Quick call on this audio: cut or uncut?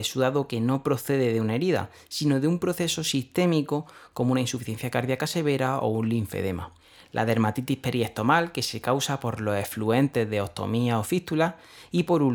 uncut